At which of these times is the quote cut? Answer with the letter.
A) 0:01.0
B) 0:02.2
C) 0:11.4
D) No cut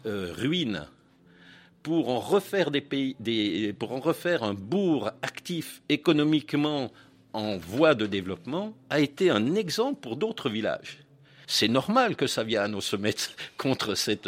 C